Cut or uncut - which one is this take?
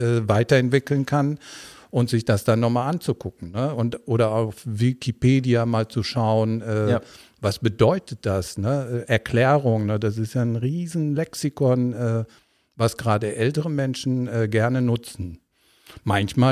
uncut